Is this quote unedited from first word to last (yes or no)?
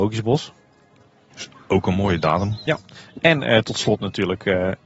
yes